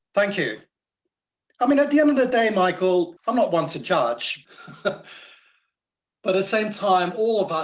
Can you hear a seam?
yes; 2 cuts; at 3.2 s, 4.4 s

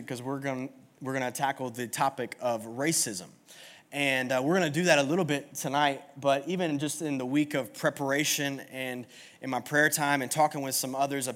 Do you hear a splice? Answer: no; 0 cuts

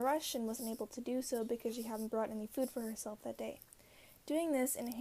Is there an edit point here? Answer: no; 0 cuts

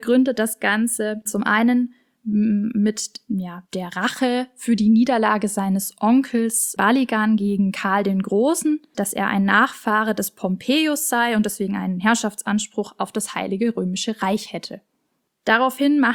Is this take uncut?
no; 1 cut; at 8.9 s

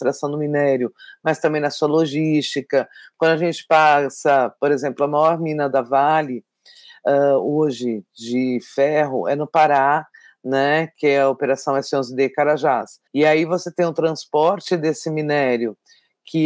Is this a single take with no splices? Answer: no; 1 cut; at 13.1 s

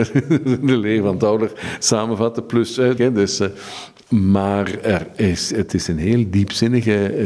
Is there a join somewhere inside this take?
yes; 1 cut; at 3.0 s

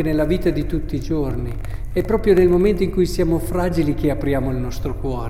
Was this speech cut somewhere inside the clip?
no; 0 cuts

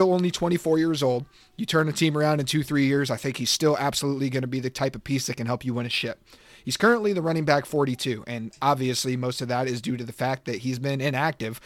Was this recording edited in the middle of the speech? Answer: no; 0 cuts

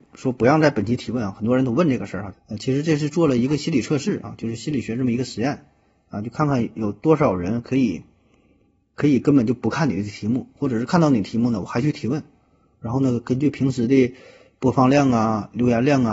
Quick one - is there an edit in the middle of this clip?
yes; 1 cut; at 2.3 s

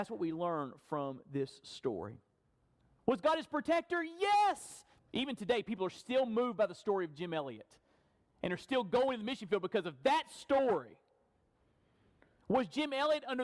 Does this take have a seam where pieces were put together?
yes; 2 cuts; at 3.0 s, 5.0 s

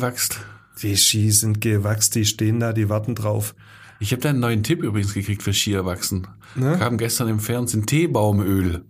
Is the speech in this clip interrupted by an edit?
no; 0 cuts

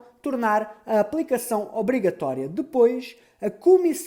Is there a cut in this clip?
no; 0 cuts

